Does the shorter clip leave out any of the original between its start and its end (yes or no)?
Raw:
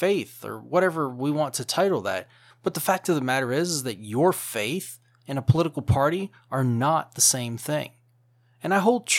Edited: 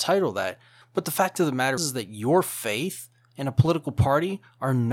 yes